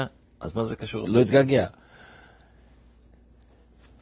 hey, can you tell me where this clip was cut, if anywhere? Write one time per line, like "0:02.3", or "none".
0:01.1